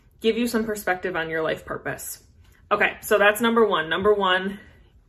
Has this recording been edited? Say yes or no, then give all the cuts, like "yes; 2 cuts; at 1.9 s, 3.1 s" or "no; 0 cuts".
no; 0 cuts